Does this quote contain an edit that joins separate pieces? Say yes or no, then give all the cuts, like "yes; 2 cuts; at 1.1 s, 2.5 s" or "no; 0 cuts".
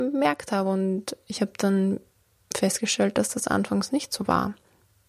no; 0 cuts